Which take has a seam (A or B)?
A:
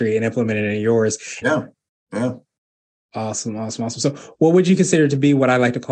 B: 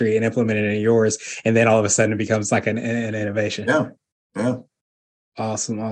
A